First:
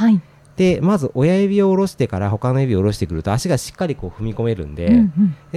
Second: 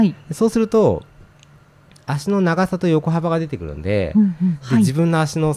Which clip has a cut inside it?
second; 1 cut; at 4.6 s

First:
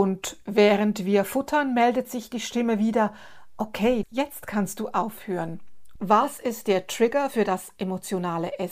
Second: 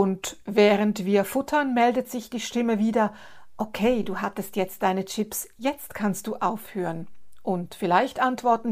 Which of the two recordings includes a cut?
first; 2 cuts; at 4.0 s, 6.0 s

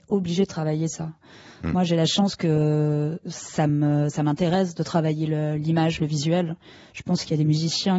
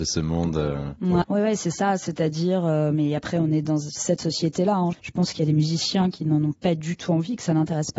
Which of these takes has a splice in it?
second; 2 cuts; at 1.2 s, 4.9 s

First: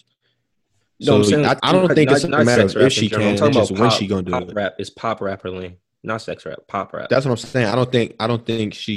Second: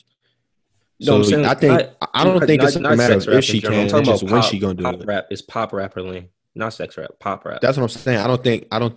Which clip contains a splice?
first; 1 cut; at 1.6 s

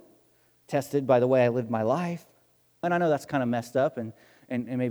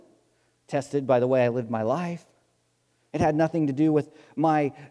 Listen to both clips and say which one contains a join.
first; 1 cut; at 2.8 s

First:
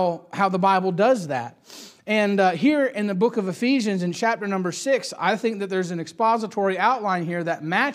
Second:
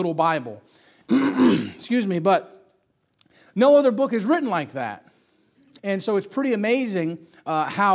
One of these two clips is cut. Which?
second; 2 cuts; at 1.0 s, 5.8 s

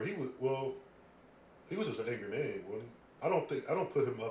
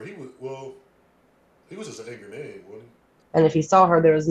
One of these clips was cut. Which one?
second; 1 cut; at 3.2 s

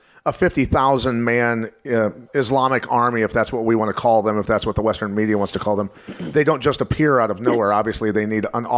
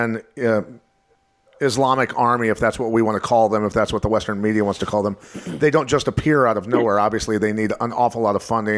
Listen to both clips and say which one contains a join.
first; 1 cut; at 2.3 s

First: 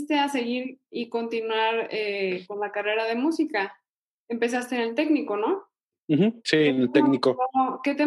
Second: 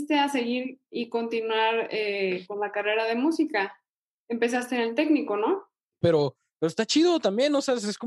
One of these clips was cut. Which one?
second; 1 cut; at 6.0 s

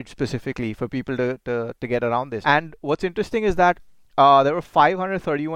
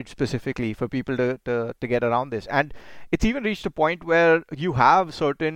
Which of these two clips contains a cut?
first; 1 cut; at 2.4 s

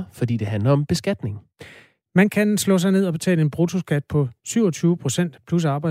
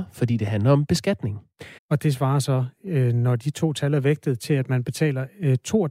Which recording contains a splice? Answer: second; 1 cut; at 1.8 s

